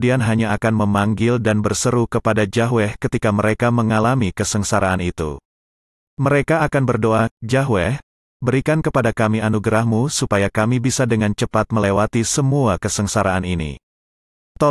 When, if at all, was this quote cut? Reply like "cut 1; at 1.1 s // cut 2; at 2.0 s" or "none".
none